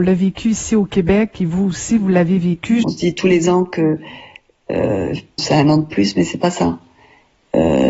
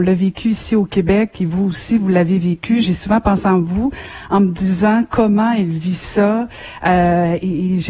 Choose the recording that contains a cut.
first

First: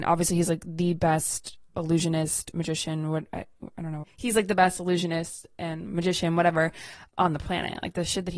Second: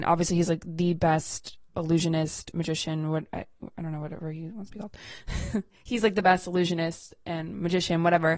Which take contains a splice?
first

